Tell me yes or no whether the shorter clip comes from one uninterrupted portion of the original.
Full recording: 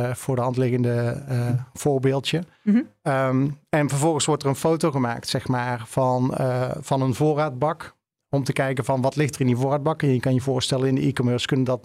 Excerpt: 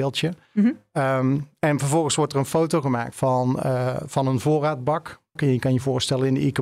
no